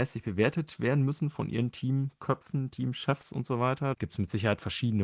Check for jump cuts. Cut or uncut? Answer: cut